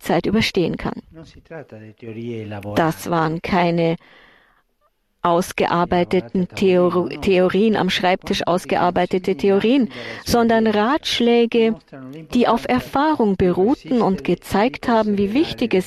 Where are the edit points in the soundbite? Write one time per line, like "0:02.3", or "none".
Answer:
none